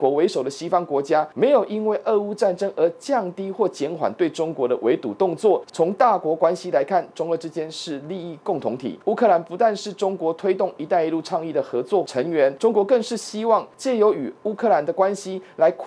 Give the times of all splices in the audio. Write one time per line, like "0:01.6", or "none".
0:05.7
0:09.0